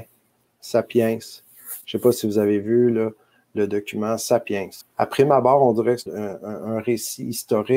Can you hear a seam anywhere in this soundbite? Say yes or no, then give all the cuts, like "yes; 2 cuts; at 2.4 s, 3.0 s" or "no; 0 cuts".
yes; 2 cuts; at 4.8 s, 6.1 s